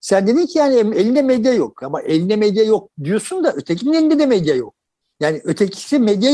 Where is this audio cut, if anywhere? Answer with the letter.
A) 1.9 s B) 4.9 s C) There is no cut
C